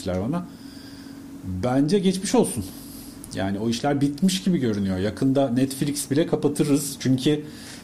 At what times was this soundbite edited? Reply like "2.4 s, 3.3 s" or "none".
none